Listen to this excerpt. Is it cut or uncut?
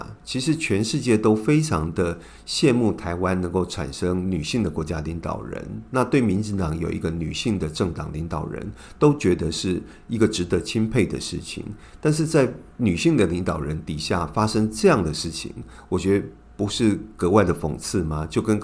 uncut